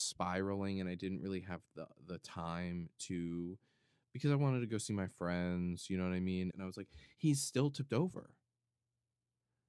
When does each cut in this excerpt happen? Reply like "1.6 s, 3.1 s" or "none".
6.5 s

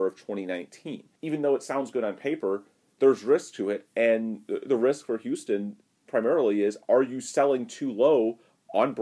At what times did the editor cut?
1.2 s

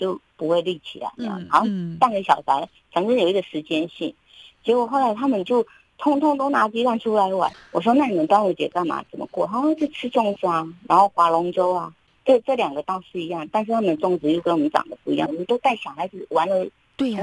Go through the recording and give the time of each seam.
15.3 s

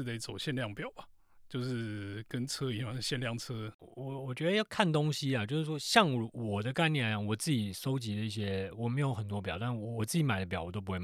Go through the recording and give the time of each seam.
none

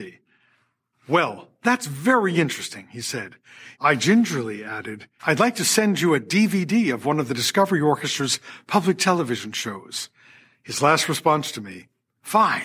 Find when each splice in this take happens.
0.9 s, 3.8 s, 5.2 s

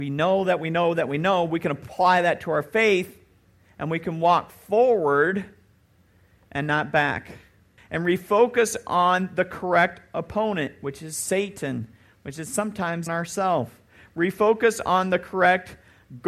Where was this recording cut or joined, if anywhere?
7.8 s, 13.1 s

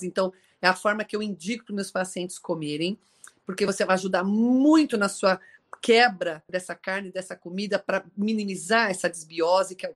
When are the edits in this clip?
6.5 s

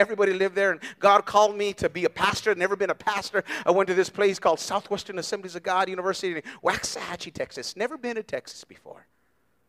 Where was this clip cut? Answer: none

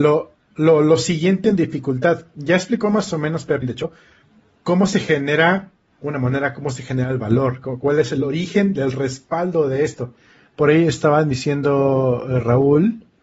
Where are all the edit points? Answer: 3.6 s

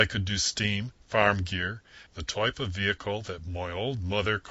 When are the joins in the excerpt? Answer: 2.1 s

